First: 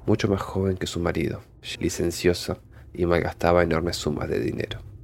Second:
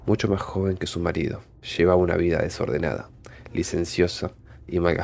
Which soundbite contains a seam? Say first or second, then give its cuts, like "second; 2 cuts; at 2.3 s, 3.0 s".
first; 1 cut; at 1.8 s